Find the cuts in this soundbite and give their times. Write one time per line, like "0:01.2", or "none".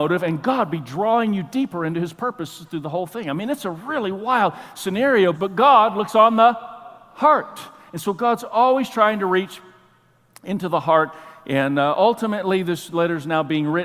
0:05.3